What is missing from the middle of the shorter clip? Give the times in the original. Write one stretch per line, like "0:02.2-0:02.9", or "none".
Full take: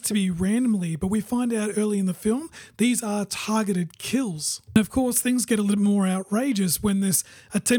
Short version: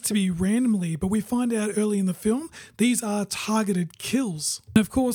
none